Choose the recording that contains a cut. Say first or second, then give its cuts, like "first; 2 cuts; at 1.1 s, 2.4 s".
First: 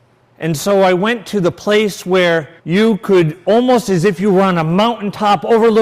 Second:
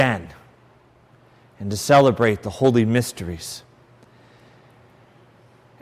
first; 1 cut; at 2.6 s